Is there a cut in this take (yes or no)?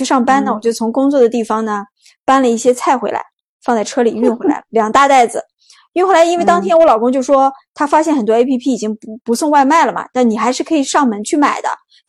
no